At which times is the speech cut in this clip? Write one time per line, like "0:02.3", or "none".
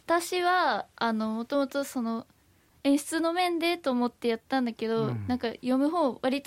0:02.7